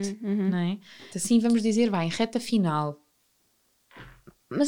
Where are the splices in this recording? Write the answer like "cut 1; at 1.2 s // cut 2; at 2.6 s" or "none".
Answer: cut 1; at 1.1 s